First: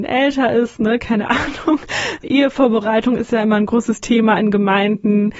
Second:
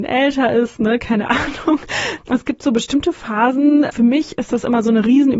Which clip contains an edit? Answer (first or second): second